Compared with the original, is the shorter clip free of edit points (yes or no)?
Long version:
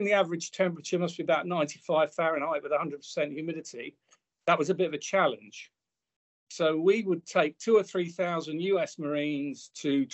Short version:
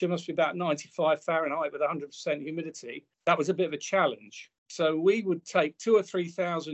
no